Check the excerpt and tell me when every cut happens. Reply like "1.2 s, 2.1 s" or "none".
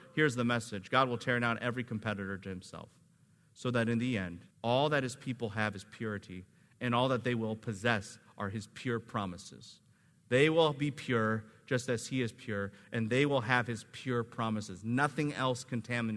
4.5 s